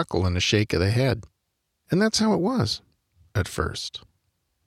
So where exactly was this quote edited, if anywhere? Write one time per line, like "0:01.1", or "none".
none